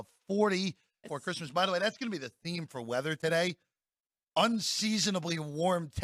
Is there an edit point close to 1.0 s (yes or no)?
yes